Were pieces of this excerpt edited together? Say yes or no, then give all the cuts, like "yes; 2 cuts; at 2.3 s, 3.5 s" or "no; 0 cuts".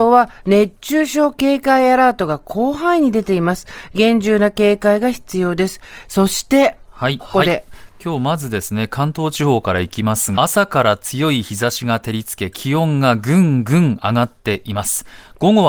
yes; 2 cuts; at 7.2 s, 10.3 s